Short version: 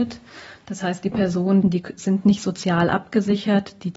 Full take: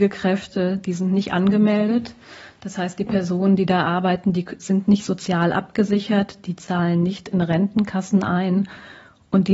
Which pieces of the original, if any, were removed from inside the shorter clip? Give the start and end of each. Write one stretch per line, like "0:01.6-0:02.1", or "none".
0:03.6-0:04.2

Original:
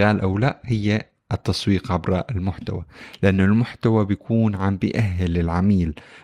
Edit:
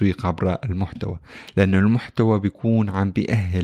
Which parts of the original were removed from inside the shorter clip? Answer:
none

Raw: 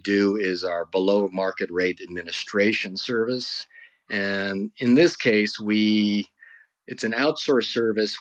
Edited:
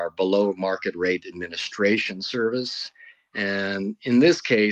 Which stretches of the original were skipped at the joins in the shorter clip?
none

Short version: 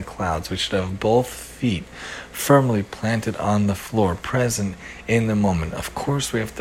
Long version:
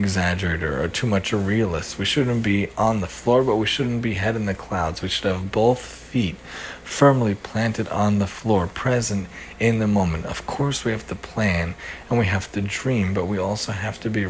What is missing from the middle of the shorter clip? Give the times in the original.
none

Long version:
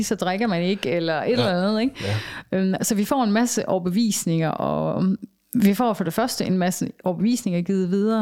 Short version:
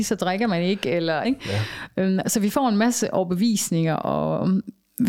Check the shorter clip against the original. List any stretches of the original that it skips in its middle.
0:01.2-0:01.8

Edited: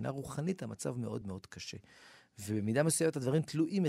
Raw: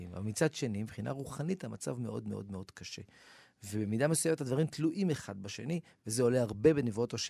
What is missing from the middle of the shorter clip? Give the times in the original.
0:02.2-0:02.5

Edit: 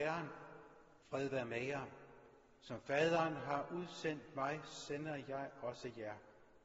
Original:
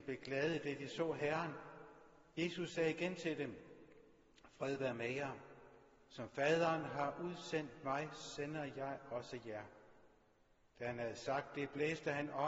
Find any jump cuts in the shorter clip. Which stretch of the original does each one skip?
0:02.3-0:04.5

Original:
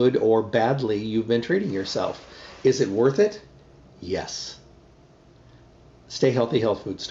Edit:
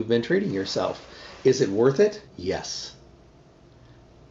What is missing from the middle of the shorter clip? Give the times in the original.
0:03.5-0:03.9

